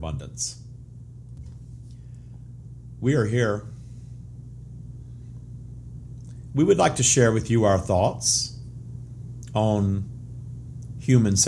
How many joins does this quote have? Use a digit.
0